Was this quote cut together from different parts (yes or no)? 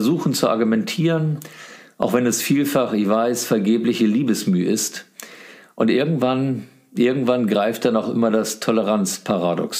no